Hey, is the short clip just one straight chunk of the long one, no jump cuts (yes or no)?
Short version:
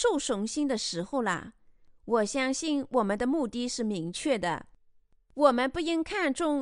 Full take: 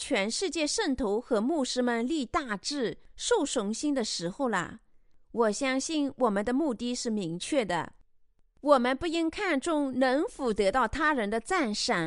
yes